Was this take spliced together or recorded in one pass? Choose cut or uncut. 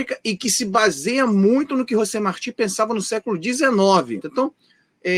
cut